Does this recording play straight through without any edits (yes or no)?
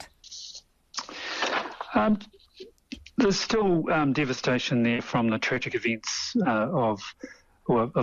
yes